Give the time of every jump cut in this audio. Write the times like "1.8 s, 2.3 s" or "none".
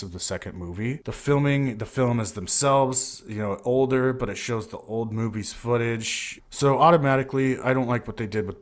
1.0 s, 6.4 s